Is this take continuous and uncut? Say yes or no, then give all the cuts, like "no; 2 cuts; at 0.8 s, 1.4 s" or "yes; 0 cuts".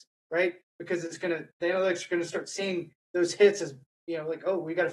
yes; 0 cuts